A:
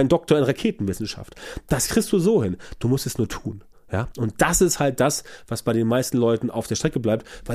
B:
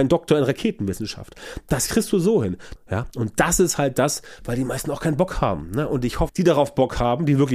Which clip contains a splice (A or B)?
B